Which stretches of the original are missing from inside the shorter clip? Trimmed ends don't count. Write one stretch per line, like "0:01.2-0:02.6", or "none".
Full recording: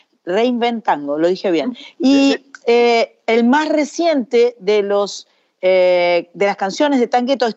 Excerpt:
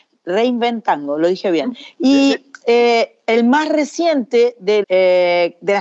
0:04.8-0:05.6

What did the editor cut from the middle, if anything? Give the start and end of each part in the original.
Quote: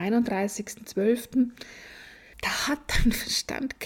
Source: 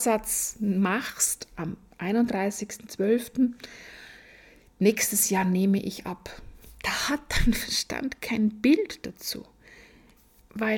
0:04.4-0:06.7

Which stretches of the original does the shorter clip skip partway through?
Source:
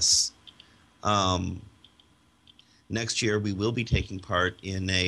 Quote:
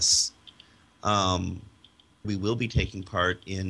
0:02.2-0:03.4

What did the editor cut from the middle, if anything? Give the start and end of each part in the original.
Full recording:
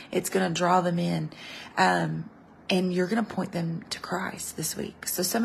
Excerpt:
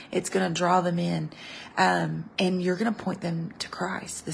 0:02.3-0:02.6

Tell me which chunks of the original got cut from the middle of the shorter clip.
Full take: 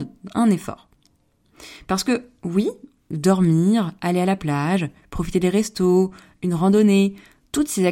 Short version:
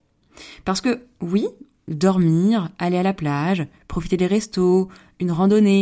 none

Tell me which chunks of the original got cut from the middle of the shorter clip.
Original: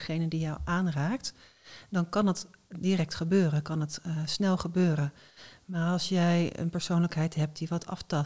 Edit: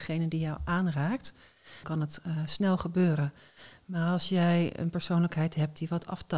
0:01.8-0:03.6

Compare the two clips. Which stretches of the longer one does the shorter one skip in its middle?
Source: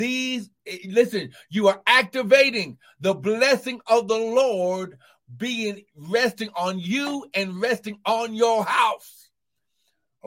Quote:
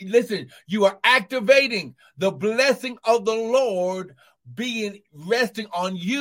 none

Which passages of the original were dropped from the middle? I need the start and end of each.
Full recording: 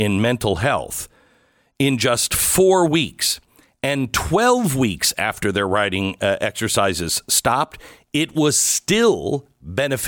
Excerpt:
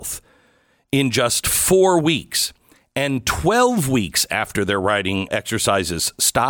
0:06.2-0:06.4

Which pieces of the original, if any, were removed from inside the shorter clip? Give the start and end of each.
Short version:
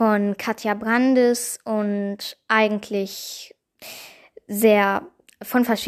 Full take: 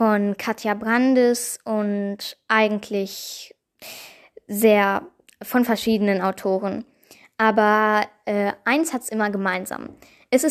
none

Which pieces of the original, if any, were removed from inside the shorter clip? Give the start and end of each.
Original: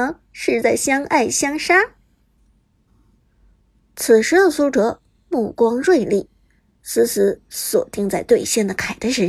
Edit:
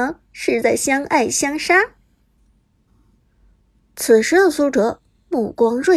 none

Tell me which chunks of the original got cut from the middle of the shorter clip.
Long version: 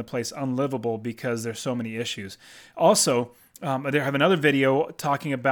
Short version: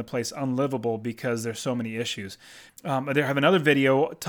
0:02.7-0:03.5

